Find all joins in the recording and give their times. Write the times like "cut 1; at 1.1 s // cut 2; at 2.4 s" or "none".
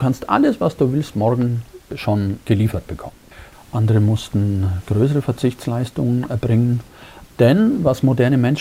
cut 1; at 3.5 s // cut 2; at 7.3 s